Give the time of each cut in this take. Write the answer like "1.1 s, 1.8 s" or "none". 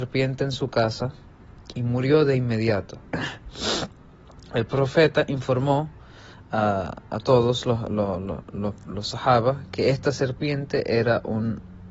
none